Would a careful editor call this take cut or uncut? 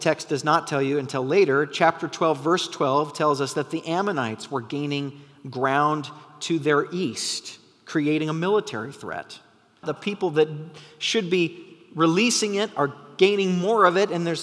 cut